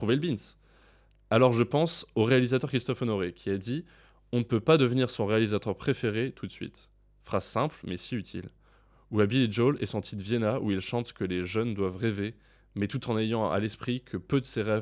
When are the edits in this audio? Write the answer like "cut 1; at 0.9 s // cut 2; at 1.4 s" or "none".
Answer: none